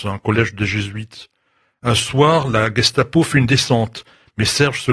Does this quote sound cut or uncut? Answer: uncut